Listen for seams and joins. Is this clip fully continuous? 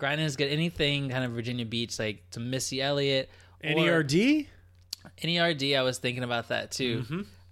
yes; 0 cuts

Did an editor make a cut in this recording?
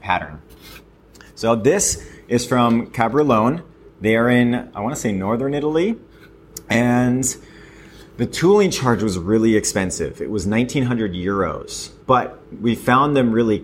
yes; 1 cut; at 12.0 s

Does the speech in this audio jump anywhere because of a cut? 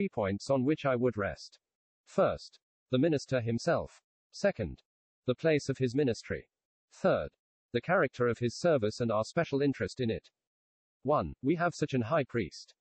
no; 0 cuts

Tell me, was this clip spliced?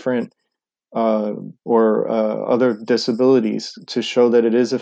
yes; 1 cut; at 1.6 s

